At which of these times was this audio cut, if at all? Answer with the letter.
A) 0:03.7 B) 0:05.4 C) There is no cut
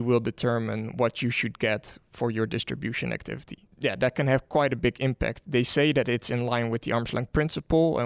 A